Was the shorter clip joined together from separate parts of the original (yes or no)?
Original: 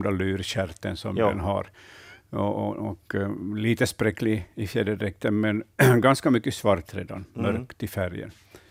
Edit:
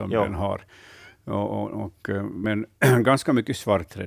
yes